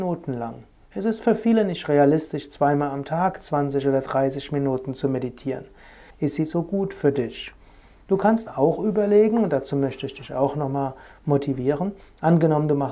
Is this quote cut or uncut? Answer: cut